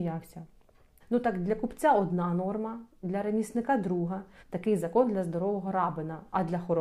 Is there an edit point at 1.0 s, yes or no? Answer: yes